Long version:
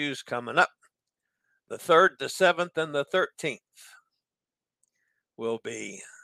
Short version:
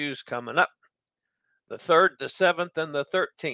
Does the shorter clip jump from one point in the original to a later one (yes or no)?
no